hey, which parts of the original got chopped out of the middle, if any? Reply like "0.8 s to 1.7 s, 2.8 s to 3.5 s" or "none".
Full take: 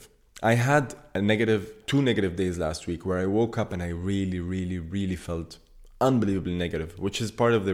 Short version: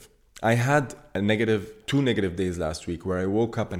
none